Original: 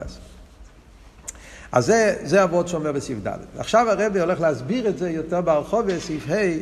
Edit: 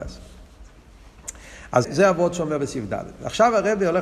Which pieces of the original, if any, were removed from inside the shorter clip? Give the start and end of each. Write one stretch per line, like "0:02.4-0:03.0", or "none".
0:01.8-0:02.2